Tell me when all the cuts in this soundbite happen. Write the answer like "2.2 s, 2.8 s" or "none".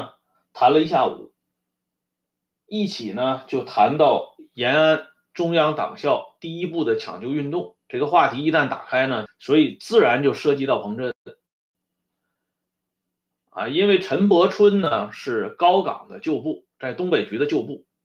9.3 s